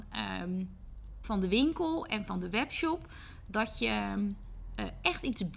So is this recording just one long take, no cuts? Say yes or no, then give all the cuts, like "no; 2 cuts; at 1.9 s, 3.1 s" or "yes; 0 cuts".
no; 1 cut; at 1.2 s